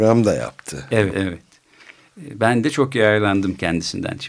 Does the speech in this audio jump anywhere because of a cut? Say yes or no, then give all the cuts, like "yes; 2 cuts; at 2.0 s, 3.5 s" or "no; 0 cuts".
yes; 1 cut; at 1.1 s